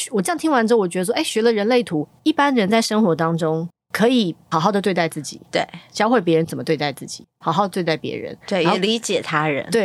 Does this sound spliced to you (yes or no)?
yes